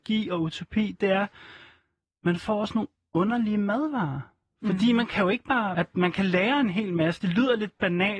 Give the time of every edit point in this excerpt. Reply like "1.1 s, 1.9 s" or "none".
5.7 s